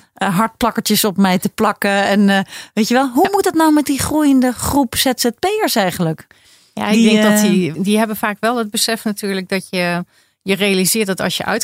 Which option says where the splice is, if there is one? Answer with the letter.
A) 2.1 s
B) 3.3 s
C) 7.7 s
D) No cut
C